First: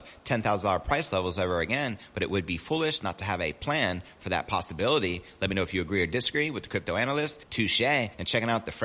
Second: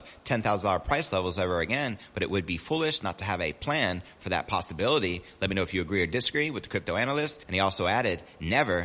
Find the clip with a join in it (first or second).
first